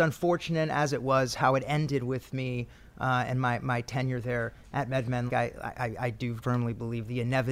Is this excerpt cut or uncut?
cut